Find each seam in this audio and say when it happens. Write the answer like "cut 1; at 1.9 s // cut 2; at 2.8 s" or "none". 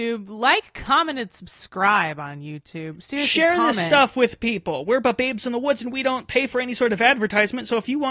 none